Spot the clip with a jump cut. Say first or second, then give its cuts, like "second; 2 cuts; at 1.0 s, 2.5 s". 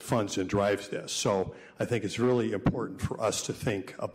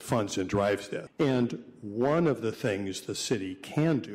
second; 1 cut; at 1.1 s